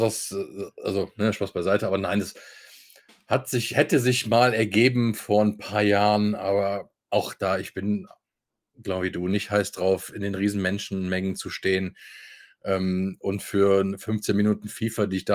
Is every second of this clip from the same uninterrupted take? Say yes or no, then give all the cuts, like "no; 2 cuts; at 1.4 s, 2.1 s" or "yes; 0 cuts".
yes; 0 cuts